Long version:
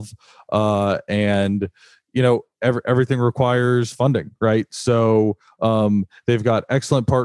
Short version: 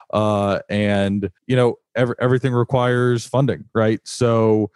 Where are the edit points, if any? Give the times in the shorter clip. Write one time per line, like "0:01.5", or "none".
0:01.4